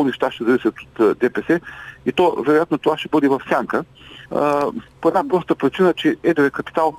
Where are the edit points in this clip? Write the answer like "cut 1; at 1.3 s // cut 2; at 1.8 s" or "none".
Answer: cut 1; at 4.3 s